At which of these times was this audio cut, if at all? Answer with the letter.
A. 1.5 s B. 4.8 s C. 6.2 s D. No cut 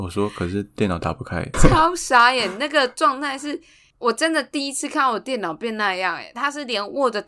A